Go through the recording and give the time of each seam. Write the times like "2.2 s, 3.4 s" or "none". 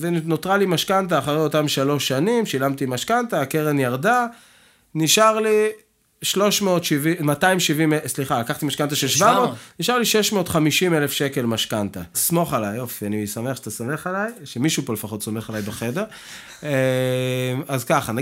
12.1 s